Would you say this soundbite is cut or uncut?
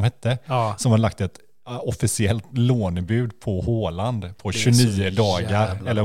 uncut